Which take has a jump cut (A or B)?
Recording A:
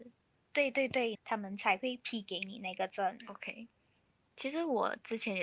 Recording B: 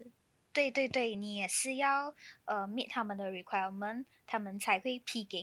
A